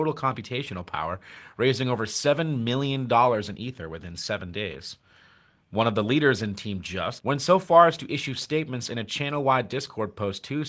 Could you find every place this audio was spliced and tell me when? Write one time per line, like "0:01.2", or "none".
0:07.2